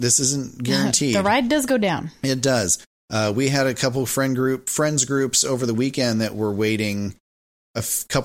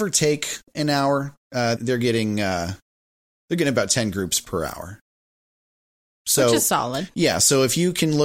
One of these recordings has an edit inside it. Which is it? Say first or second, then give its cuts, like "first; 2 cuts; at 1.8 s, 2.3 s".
second; 1 cut; at 1.8 s